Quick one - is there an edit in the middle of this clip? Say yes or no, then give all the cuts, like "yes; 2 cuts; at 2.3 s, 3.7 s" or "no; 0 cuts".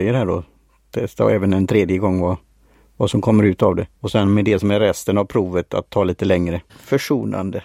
yes; 2 cuts; at 3.9 s, 6.7 s